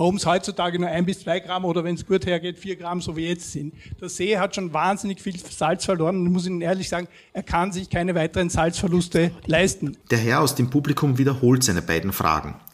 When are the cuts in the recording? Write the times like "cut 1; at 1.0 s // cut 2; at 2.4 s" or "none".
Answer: cut 1; at 10.0 s